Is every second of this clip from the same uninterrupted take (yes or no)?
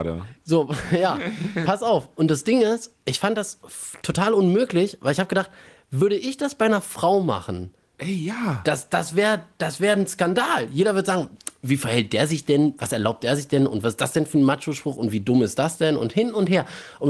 yes